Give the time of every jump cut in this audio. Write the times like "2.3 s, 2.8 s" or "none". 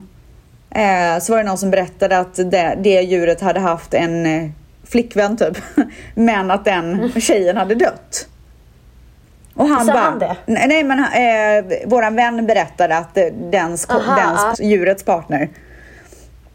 14.5 s